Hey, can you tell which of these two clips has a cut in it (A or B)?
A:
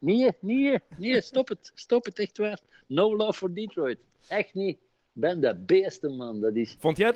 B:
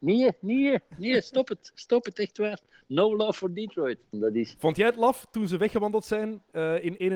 B